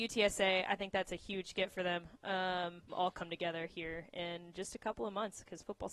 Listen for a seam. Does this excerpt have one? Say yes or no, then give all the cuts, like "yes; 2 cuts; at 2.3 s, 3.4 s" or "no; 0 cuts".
yes; 1 cut; at 2.9 s